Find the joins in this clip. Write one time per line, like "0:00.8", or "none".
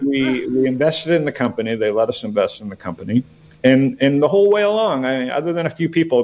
none